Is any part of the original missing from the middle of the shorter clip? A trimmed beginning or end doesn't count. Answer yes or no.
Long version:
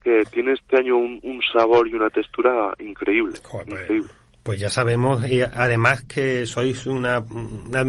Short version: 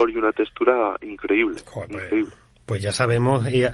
no